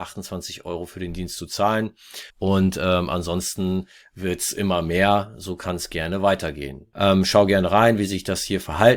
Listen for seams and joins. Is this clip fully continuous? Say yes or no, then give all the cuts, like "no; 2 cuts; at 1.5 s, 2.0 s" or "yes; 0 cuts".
no; 2 cuts; at 2.3 s, 6.9 s